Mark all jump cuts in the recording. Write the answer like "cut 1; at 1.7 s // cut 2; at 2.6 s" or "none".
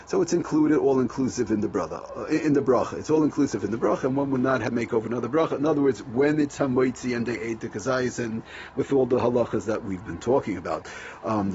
none